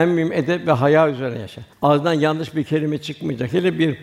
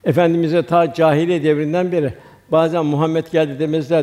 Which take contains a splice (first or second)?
first